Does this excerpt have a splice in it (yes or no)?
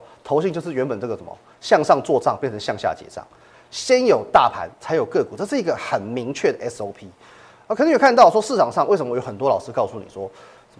yes